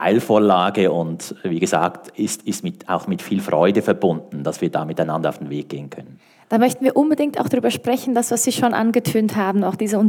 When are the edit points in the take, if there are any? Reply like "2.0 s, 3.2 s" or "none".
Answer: none